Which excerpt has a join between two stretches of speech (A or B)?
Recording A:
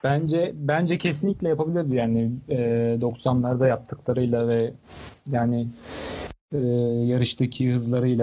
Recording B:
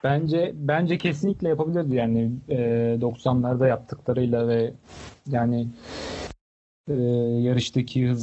A